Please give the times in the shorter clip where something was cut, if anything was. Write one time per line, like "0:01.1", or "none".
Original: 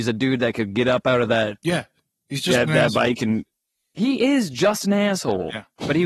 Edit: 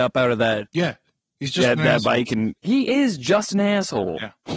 0:02.6